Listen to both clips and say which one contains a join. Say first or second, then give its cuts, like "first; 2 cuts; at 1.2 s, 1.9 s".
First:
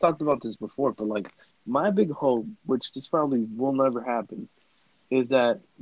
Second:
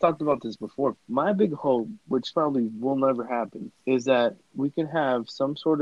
second; 3 cuts; at 1.0 s, 2.3 s, 3.8 s